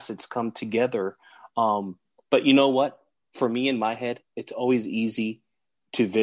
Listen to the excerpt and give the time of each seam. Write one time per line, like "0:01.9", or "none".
none